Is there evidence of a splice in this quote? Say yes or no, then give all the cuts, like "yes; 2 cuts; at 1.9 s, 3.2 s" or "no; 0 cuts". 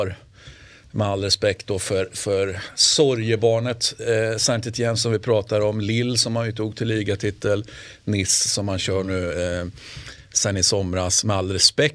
no; 0 cuts